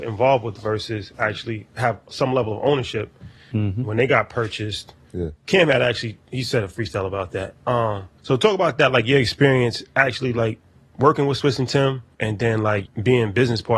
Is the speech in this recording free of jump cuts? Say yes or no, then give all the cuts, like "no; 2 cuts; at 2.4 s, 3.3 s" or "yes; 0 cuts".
no; 1 cut; at 12.8 s